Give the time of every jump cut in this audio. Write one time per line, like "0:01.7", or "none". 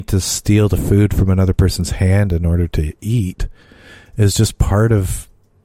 none